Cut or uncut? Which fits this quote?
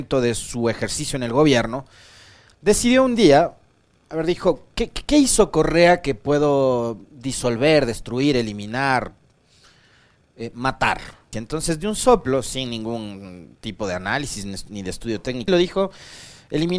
cut